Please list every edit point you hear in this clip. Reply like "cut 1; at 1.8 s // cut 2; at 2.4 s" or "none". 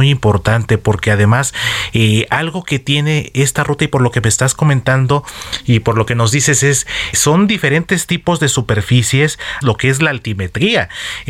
cut 1; at 7.1 s // cut 2; at 9.6 s